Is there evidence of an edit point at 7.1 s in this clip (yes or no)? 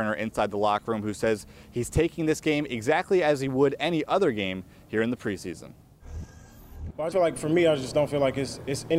yes